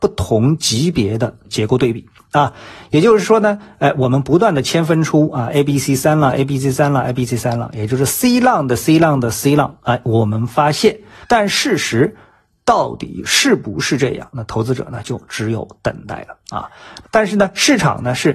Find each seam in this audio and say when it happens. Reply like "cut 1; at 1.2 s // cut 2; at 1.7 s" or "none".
cut 1; at 11.2 s // cut 2; at 17.0 s

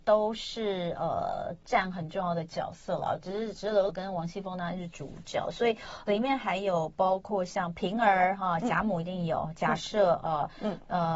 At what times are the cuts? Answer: cut 1; at 3.9 s

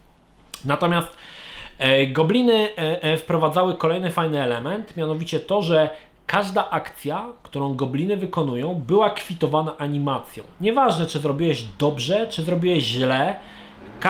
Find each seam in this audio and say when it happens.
none

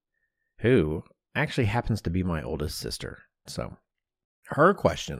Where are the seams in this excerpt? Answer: cut 1; at 3.5 s

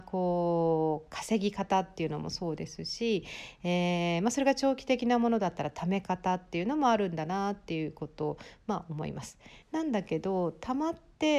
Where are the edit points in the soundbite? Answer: cut 1; at 9.6 s

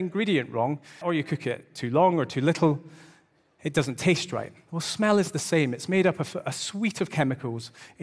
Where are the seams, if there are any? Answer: cut 1; at 1.0 s

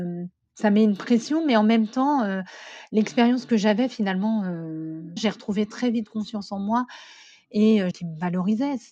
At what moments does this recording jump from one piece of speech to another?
cut 1; at 5.2 s // cut 2; at 7.9 s

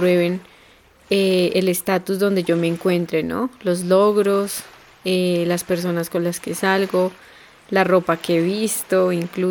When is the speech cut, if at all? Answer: none

